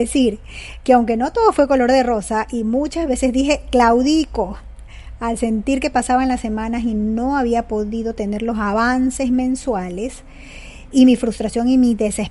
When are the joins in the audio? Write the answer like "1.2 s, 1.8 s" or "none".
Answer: 10.9 s